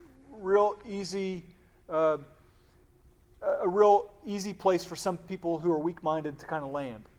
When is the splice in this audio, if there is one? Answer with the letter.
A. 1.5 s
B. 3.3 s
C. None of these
C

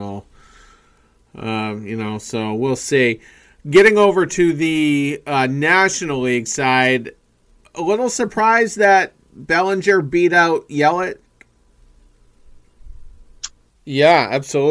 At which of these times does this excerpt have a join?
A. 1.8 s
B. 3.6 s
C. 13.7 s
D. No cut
C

